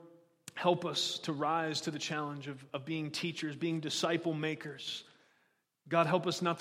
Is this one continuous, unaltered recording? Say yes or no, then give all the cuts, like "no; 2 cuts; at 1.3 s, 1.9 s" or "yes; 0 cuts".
yes; 0 cuts